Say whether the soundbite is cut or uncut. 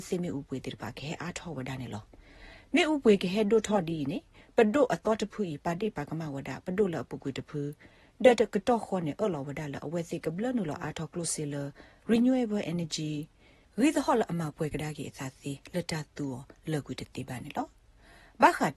uncut